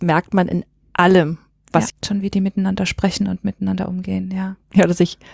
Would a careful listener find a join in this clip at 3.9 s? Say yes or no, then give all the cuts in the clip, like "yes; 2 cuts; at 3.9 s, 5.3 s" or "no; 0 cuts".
no; 1 cut; at 1.9 s